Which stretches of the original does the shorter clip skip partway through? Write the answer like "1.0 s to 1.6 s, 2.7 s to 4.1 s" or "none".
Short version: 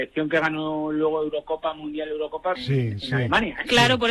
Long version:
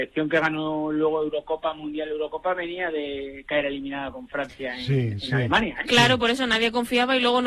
2.6 s to 4.8 s